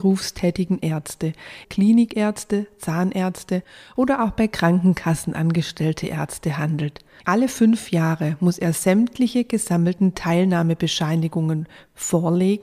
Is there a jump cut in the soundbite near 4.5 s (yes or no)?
no